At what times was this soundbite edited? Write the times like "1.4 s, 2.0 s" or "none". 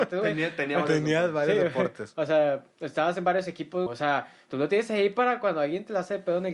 2.7 s, 3.9 s